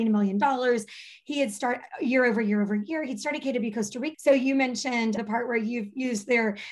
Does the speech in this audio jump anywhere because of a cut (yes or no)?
yes